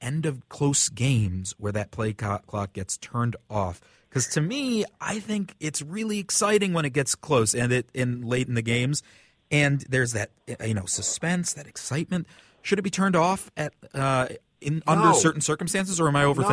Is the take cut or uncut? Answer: uncut